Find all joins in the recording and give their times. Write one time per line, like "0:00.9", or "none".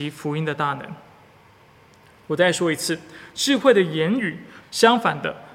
0:04.6